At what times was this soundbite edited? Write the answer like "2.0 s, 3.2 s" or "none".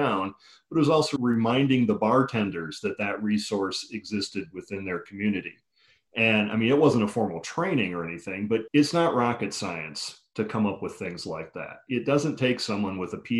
none